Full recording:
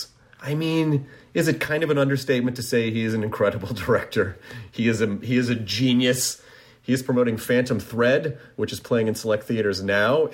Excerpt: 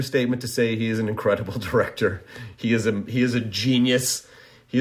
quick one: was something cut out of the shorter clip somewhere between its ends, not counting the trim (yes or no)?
no